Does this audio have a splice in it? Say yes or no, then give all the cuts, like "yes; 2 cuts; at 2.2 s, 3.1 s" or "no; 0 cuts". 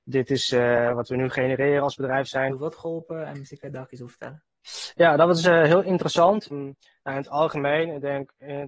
yes; 2 cuts; at 2.5 s, 6.5 s